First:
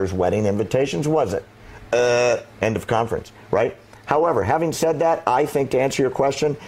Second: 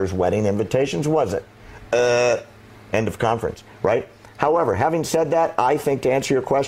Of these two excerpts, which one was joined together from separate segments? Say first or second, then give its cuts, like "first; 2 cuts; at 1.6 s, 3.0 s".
first; 1 cut; at 2.5 s